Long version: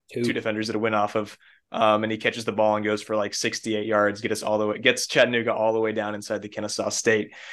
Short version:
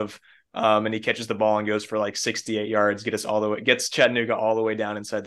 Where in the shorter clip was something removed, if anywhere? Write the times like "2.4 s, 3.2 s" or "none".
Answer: none